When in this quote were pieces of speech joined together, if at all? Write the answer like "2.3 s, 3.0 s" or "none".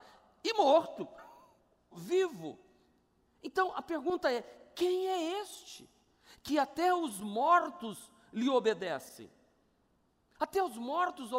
1.9 s